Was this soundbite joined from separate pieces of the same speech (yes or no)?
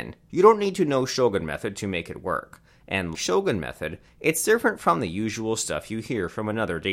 yes